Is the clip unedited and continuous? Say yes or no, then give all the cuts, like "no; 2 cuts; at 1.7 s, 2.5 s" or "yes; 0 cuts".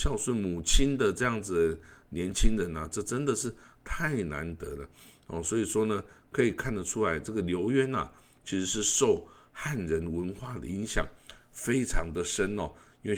yes; 0 cuts